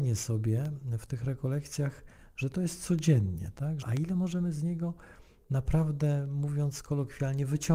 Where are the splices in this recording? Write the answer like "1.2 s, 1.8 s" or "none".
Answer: 3.8 s